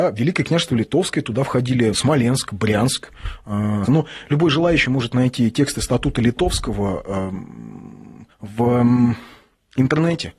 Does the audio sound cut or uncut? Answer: cut